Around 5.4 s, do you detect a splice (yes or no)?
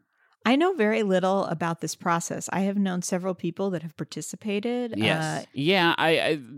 yes